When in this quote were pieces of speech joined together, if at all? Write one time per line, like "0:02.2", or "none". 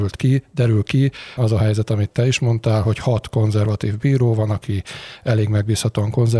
0:01.4